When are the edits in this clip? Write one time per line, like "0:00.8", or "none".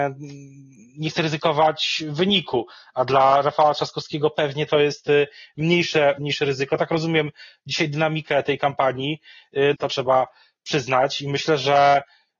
0:06.2
0:09.7